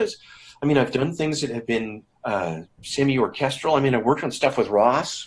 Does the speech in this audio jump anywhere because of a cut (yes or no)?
yes